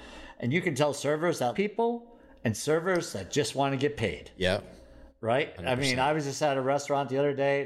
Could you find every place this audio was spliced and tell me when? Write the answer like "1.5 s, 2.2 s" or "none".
1.5 s

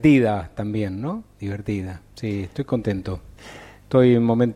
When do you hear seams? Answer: none

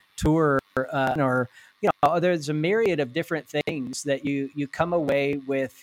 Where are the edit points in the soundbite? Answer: 1.2 s

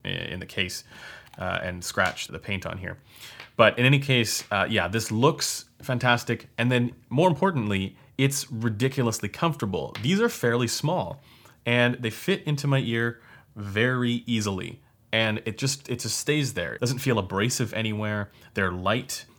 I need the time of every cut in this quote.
2.3 s

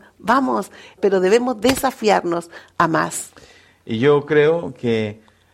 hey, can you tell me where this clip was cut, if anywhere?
1.0 s

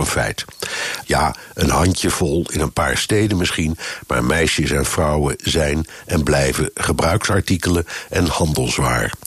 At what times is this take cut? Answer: 1.0 s

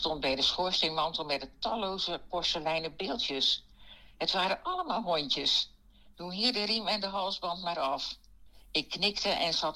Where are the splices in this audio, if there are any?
6.1 s

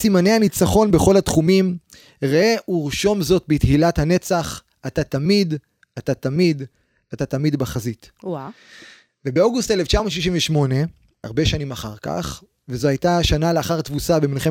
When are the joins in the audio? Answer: 11.2 s

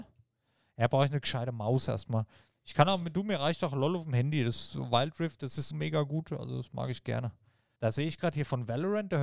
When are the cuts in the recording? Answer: 5.7 s, 7.8 s

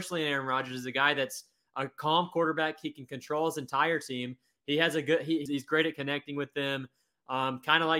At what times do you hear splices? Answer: 5.5 s

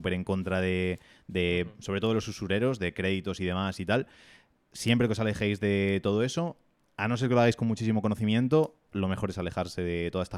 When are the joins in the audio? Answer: none

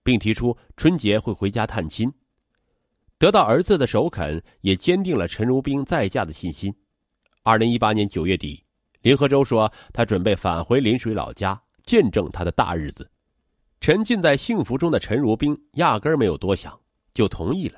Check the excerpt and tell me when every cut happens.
11.8 s

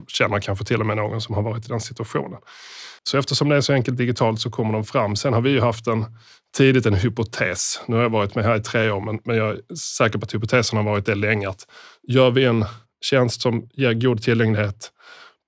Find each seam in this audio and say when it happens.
3.0 s

